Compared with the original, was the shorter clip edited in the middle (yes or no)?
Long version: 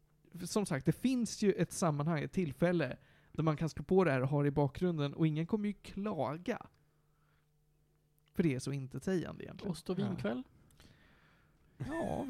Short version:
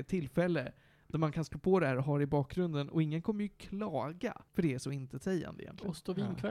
yes